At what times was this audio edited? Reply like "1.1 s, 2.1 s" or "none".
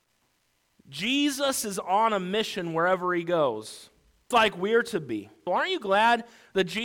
4.3 s, 5.5 s